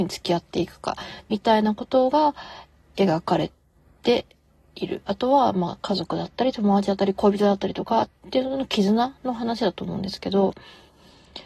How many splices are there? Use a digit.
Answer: 0